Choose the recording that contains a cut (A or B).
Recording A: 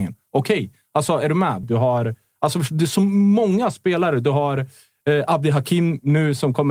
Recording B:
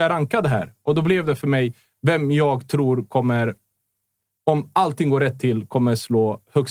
A